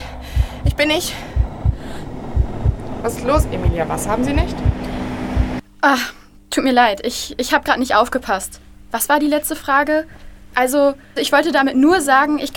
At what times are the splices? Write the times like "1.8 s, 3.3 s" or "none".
11.2 s